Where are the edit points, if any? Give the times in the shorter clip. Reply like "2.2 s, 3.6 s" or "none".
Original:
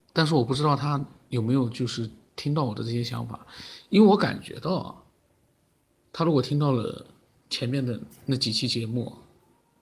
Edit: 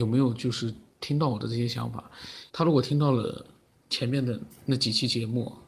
2.5 s